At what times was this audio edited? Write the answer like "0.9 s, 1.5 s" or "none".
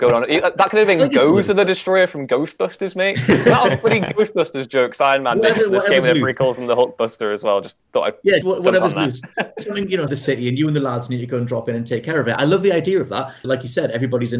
8.4 s, 10.1 s, 13.4 s